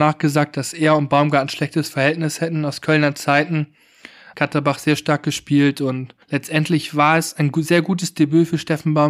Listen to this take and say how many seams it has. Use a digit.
2